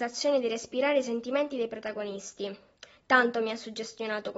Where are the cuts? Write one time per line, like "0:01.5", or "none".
none